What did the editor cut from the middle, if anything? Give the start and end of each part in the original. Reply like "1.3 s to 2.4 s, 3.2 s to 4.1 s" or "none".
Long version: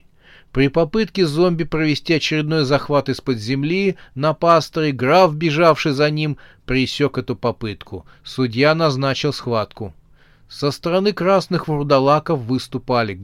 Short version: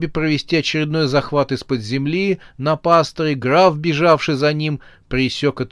none